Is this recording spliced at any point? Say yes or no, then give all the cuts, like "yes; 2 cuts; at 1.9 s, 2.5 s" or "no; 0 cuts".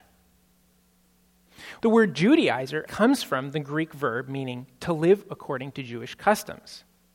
yes; 2 cuts; at 1.8 s, 2.9 s